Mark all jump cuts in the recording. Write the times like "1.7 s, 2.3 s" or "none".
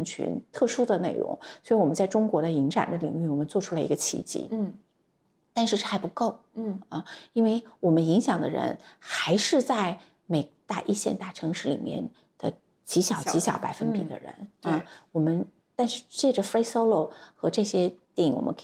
none